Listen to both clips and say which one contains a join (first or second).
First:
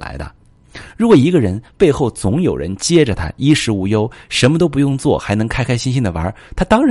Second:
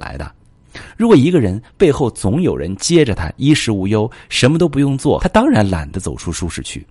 second